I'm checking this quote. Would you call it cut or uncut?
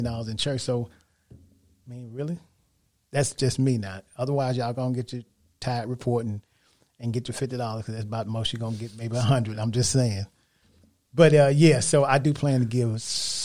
uncut